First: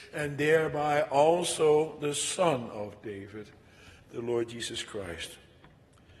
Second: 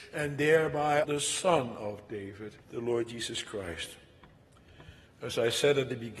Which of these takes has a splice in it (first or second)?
second